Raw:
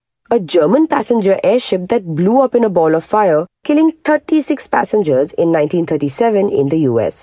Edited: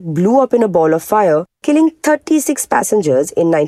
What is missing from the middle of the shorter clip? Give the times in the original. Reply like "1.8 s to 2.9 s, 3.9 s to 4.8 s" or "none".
none